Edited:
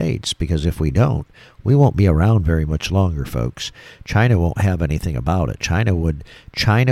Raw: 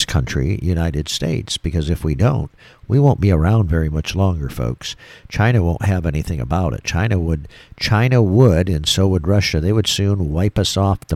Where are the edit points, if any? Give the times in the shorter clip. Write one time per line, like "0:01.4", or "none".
none